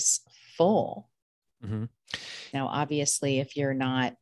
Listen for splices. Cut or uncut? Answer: cut